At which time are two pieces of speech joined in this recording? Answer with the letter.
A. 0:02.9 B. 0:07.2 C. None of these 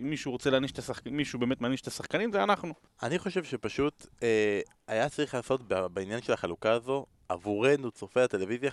A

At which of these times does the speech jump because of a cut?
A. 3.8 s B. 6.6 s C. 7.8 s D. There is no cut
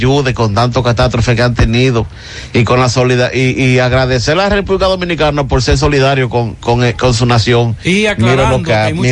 D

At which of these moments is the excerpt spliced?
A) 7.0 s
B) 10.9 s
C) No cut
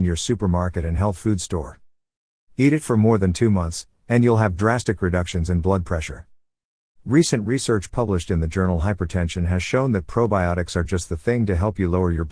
C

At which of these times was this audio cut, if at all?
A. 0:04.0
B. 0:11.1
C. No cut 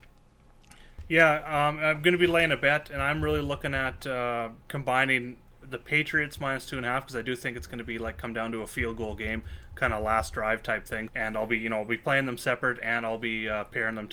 B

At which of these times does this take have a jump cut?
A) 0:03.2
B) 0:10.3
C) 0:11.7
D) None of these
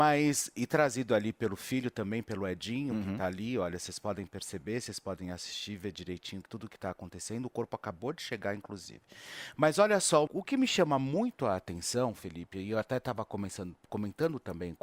B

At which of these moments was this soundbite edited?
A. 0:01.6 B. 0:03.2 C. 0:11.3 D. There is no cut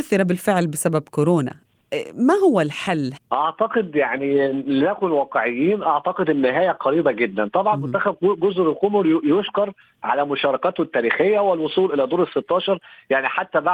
B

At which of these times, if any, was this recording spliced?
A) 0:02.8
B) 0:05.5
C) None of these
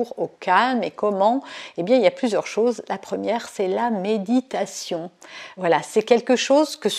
C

